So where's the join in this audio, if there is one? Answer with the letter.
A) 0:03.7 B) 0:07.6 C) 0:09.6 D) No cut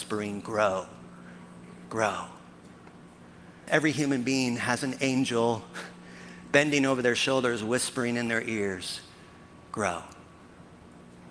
A